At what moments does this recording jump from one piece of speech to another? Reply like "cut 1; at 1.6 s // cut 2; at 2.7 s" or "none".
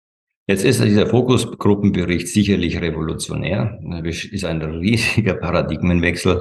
none